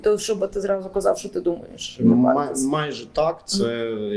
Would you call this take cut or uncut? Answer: uncut